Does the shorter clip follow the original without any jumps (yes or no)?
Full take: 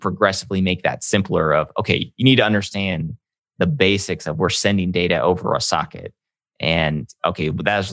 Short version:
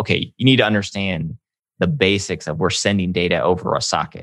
yes